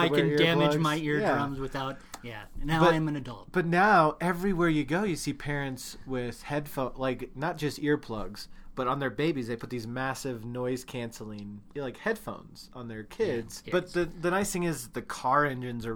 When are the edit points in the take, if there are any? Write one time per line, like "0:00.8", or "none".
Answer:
0:11.7
0:13.6